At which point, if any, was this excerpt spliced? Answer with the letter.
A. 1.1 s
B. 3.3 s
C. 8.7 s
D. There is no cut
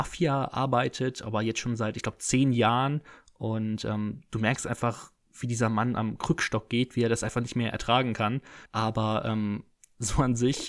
C